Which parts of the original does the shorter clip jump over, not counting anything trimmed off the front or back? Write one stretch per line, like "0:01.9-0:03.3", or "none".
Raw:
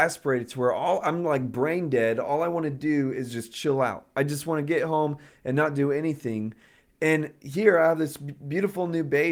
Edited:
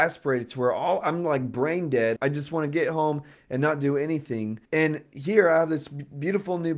0:02.2-0:04.1
0:06.6-0:06.9